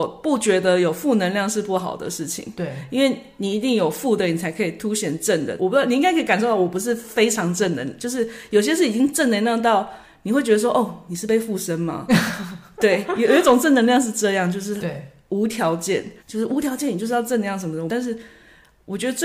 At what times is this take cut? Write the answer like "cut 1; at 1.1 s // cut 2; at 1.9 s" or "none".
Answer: cut 1; at 5.6 s // cut 2; at 16.2 s // cut 3; at 17.9 s